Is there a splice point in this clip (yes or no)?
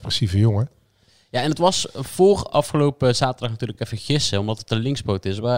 no